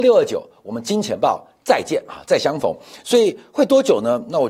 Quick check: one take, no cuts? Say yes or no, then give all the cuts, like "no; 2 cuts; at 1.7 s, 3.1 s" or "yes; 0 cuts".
yes; 0 cuts